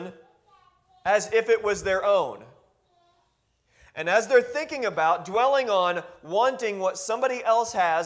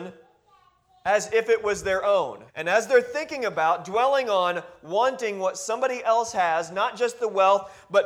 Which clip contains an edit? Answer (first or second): second